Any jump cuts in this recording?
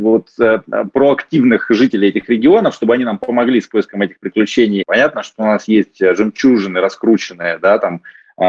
yes; 1 cut; at 4.8 s

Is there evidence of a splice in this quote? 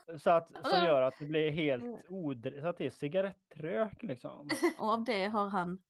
yes; 1 cut; at 4.8 s

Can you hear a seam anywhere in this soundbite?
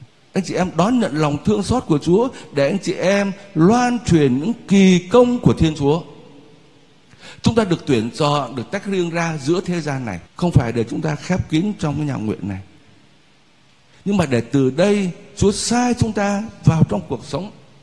yes; 1 cut; at 10.3 s

